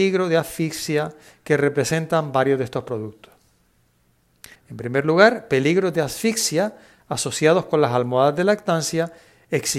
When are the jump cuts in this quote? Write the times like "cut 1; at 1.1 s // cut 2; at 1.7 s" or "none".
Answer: cut 1; at 4.6 s